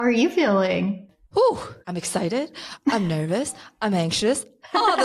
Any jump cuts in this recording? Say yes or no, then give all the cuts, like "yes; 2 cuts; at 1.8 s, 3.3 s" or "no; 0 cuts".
yes; 1 cut; at 1.8 s